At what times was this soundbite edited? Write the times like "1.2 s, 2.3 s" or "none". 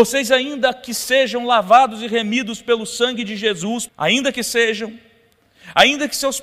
3.9 s